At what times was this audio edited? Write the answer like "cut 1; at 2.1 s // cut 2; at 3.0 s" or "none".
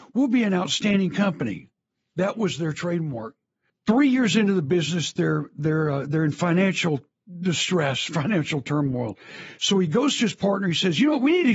cut 1; at 3.7 s